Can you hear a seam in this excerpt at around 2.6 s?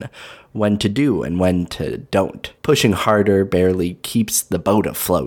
yes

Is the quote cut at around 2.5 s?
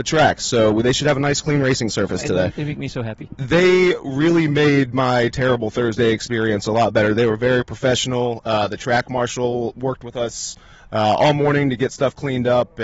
yes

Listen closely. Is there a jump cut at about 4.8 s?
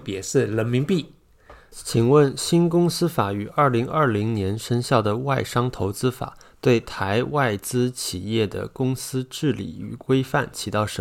no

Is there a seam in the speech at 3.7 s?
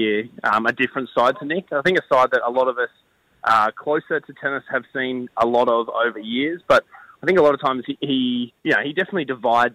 no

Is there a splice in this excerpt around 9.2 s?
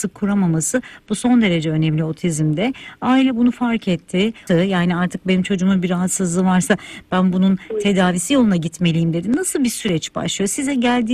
no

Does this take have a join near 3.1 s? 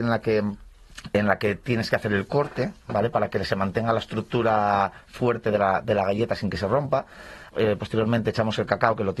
no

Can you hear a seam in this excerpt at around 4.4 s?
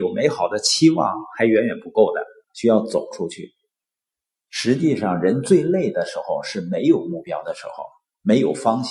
yes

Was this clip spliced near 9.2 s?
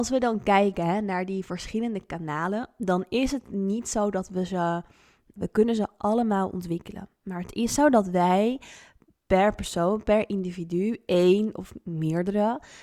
no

